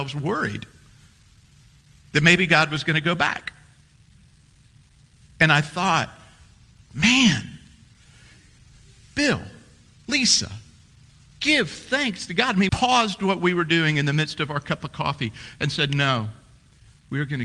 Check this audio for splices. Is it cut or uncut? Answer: cut